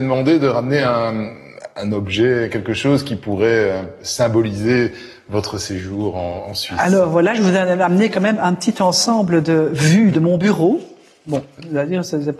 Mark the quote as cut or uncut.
uncut